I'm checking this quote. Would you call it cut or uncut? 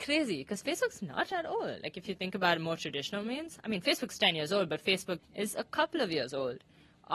cut